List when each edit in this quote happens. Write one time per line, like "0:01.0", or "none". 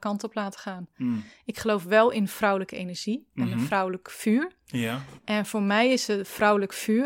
none